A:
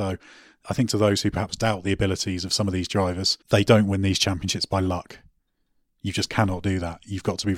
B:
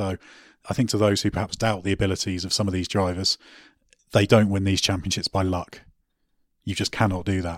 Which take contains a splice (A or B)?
A